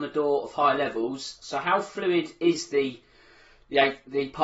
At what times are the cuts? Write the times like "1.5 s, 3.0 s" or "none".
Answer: none